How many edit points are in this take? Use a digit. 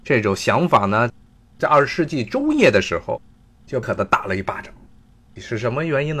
1